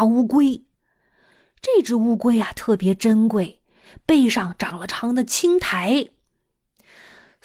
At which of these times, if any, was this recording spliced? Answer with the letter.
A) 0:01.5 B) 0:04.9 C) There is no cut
B